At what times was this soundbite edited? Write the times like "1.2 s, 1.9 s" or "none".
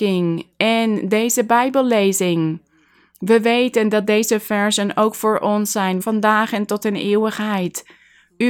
6.0 s

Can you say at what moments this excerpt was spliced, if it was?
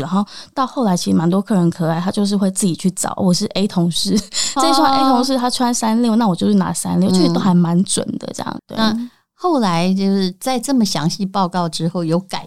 4.6 s, 8.6 s

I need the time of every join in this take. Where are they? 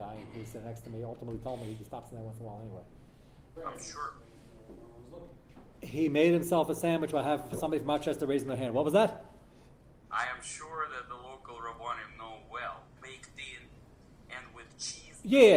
3.6 s, 13.0 s

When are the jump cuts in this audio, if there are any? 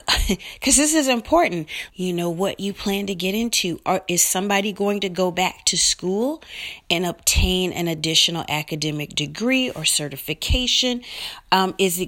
1.9 s

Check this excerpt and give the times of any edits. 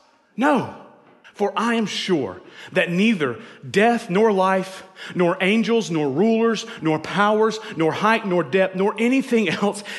1.2 s, 6.8 s

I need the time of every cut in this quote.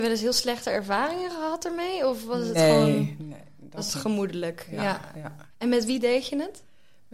5.5 s

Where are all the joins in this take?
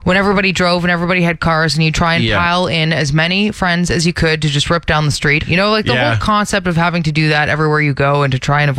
1.9 s, 5.4 s

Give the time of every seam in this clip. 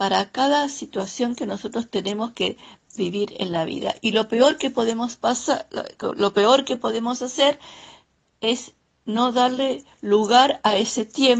none

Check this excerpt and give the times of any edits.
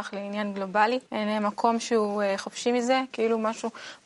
1.1 s, 3.1 s

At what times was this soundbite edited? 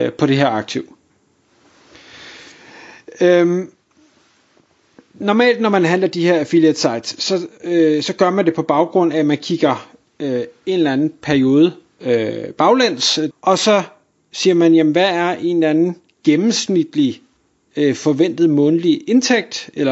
13.3 s

